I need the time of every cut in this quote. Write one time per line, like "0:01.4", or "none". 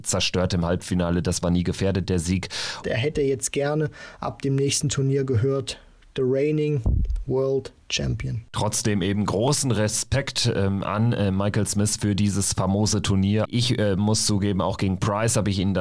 0:02.8
0:13.5